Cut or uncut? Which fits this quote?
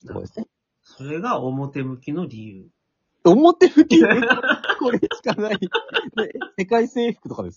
uncut